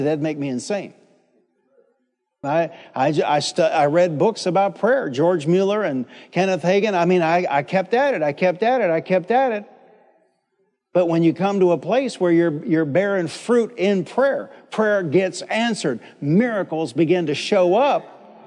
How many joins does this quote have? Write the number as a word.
one